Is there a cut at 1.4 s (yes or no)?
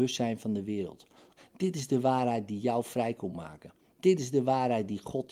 yes